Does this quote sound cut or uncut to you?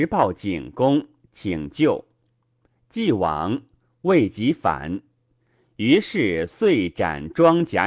uncut